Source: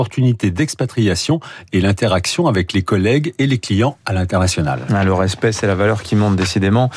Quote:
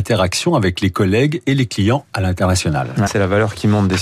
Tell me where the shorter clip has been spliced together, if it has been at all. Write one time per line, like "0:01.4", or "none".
0:03.1